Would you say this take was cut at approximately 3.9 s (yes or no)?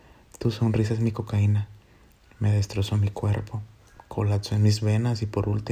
no